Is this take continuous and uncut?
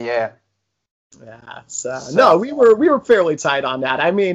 yes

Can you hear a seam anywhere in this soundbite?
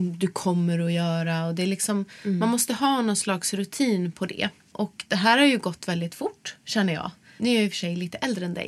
no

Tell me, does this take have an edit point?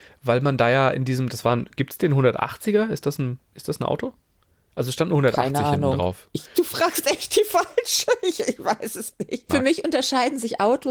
yes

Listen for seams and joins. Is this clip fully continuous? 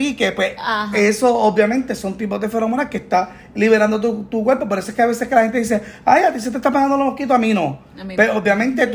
yes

